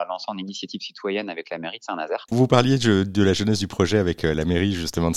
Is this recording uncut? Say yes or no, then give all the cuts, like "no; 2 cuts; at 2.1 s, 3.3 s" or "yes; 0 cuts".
no; 1 cut; at 2.3 s